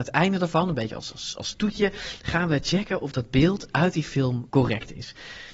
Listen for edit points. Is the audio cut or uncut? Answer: cut